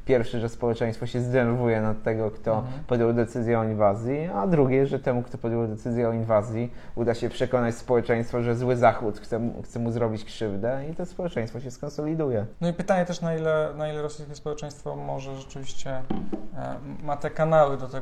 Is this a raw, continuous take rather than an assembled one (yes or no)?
yes